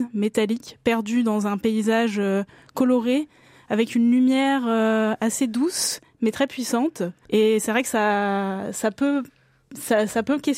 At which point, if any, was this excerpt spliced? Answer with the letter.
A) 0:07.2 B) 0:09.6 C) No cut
A